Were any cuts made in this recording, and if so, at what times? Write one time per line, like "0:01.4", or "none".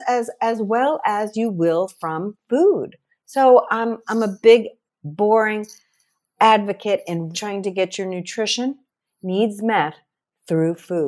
0:07.3